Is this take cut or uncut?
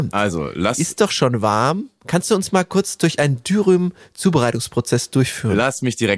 uncut